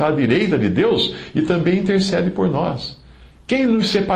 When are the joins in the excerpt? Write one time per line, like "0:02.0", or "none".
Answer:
none